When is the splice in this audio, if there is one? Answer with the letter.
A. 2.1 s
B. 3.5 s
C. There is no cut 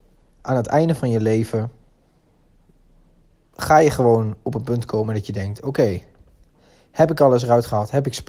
C